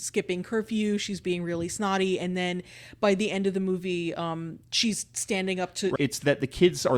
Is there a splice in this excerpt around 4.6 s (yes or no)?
no